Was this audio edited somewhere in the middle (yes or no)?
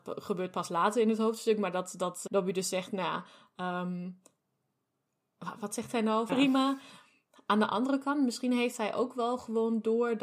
yes